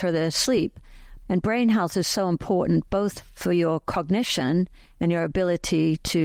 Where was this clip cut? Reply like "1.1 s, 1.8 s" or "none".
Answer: 1.2 s